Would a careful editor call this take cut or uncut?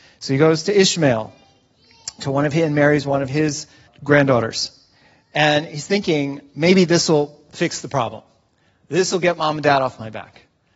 cut